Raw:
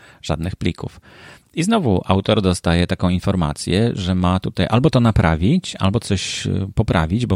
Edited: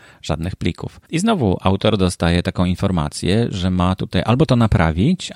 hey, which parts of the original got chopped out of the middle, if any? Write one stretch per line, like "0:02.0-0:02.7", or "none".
0:01.0-0:01.5